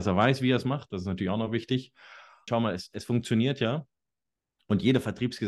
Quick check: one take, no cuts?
no; 1 cut; at 2.5 s

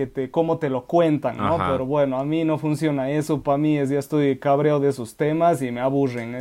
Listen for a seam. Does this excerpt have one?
no; 0 cuts

